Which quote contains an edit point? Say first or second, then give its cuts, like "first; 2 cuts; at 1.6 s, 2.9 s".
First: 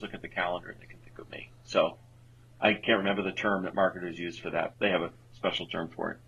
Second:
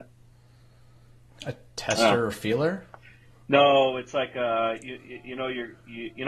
first; 1 cut; at 4.7 s